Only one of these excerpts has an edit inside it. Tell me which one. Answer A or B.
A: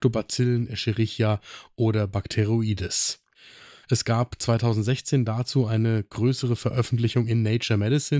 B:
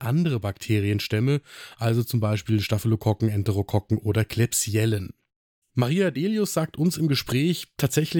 A